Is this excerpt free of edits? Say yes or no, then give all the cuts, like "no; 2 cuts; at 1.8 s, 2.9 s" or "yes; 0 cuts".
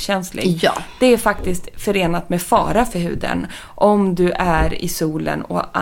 yes; 0 cuts